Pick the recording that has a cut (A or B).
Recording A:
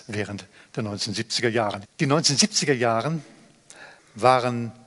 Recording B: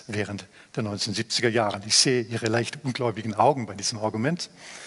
A